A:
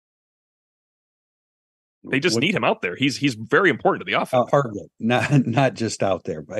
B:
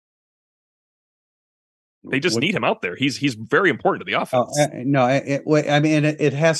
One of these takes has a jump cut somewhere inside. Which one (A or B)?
A